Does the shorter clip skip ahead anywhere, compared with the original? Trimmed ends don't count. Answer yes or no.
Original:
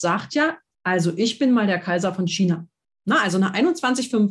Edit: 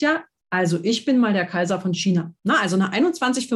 yes